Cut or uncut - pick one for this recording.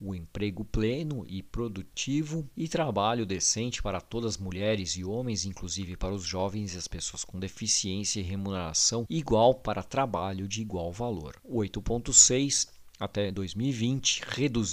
uncut